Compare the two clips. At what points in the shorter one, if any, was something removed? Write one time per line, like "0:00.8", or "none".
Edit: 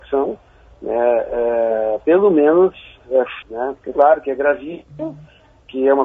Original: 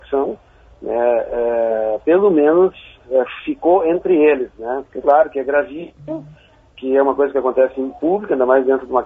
0:03.4